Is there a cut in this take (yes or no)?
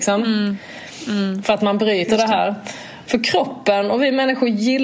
yes